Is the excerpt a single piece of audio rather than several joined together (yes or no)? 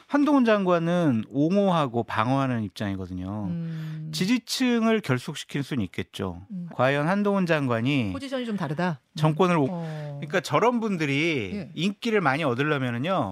no